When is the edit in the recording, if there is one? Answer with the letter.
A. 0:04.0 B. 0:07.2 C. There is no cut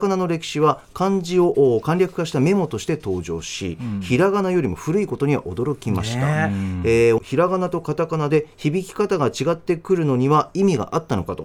B